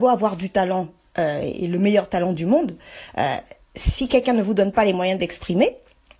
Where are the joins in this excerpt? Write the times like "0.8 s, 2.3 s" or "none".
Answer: none

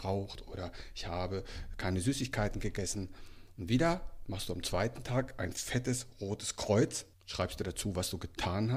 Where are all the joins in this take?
7.1 s

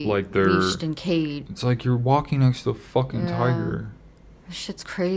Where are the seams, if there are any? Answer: 1.5 s

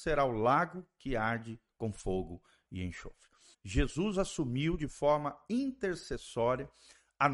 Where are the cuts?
3.5 s

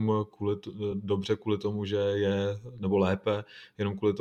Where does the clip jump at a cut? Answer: none

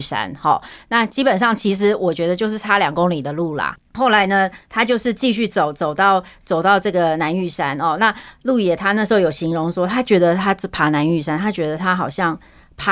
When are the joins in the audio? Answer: none

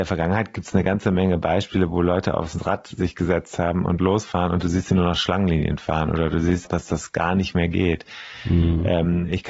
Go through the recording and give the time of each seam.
6.6 s

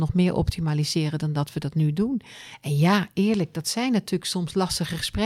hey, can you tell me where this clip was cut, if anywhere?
none

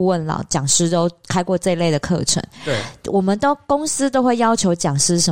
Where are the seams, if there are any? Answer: none

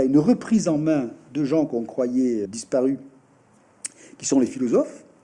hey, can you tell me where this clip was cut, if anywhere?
2.5 s

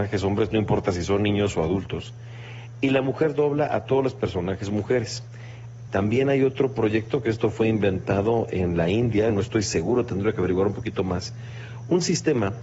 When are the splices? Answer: 5.9 s, 9.3 s

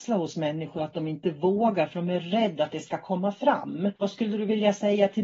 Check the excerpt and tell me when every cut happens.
4.0 s

